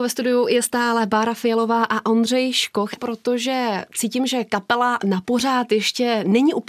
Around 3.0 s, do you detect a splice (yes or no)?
yes